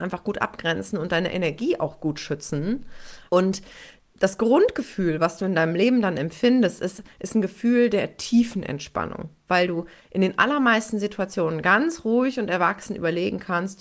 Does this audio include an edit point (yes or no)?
yes